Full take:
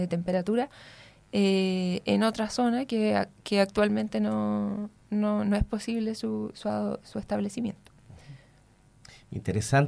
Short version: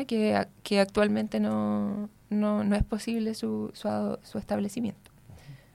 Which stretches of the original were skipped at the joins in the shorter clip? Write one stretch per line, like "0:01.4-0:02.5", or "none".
none

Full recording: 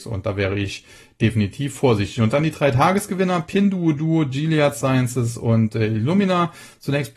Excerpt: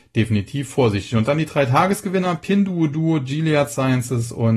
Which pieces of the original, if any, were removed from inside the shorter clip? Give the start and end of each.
none

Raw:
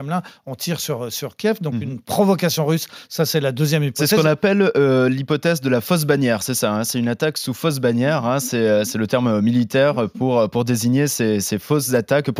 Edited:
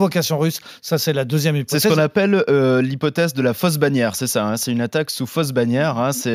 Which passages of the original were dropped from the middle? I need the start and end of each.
none

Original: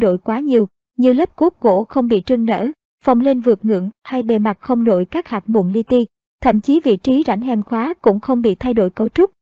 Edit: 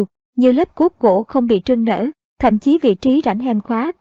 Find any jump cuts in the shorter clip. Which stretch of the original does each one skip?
0:02.8-0:06.2

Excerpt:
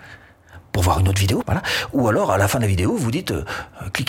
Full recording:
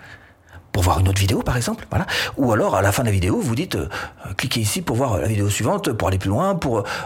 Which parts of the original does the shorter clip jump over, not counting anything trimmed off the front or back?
0:01.4-0:01.9

